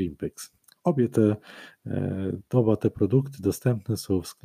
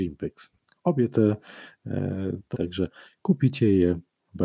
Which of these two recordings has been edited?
second; 1 cut; at 2.5 s

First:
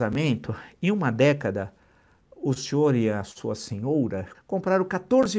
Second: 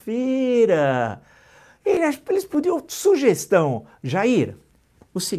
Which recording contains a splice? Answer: first; 1 cut; at 4.3 s

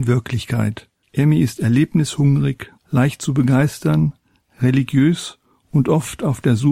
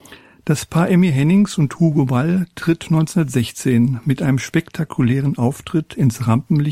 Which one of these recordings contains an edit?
first; 2 cuts; at 1.0 s, 2.8 s

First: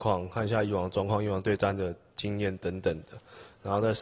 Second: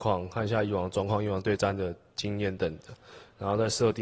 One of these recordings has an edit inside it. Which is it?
second; 1 cut; at 2.6 s

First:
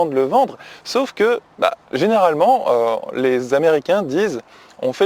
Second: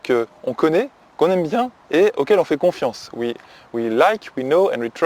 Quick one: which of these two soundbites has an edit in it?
first; 1 cut; at 1.8 s

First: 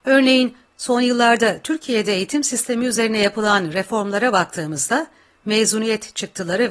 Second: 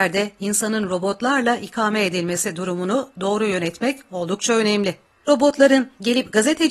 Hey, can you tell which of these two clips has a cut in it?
second; 1 cut; at 5.1 s

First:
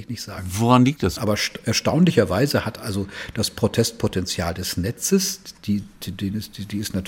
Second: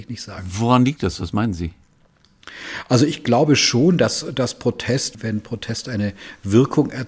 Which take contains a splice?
first; 1 cut; at 1.2 s

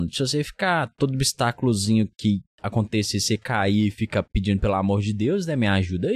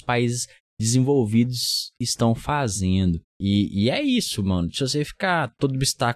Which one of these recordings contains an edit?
second; 1 cut; at 3.3 s

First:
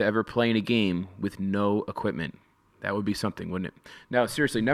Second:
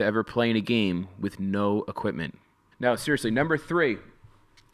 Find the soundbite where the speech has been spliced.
second; 1 cut; at 2.7 s

